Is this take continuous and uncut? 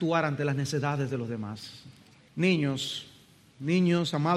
no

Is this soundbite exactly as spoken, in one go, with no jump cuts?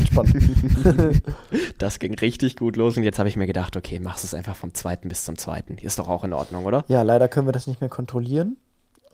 yes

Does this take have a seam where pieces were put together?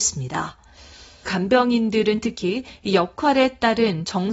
yes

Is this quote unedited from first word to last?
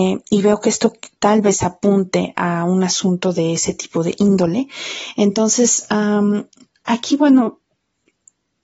yes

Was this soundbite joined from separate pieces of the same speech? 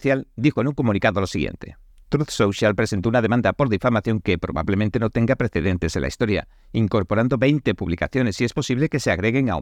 no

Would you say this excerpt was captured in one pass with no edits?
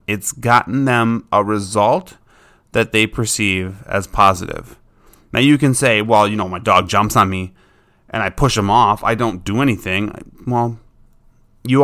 yes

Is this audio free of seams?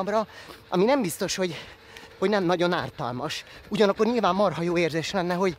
yes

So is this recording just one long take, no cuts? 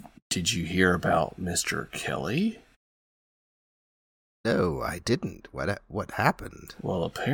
yes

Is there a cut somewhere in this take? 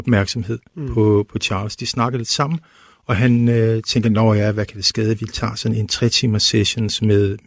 no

